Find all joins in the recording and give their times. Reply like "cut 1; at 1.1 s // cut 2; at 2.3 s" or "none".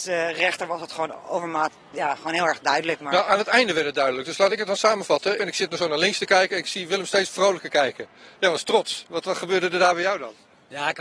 cut 1; at 5.4 s